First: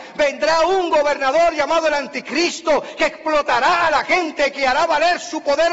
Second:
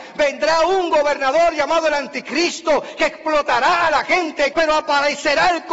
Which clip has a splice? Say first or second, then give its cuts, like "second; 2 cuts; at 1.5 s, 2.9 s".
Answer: second; 1 cut; at 4.5 s